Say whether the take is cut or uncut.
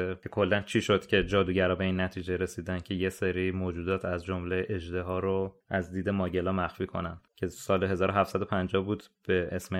uncut